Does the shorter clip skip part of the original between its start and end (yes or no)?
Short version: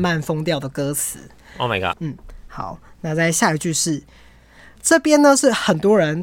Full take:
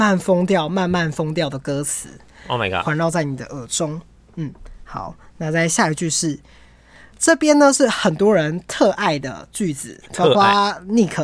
yes